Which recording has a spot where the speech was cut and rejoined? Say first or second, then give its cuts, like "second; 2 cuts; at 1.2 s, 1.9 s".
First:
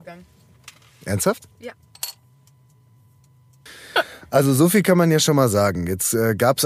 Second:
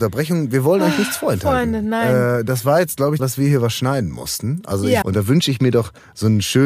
second; 2 cuts; at 3.2 s, 5.0 s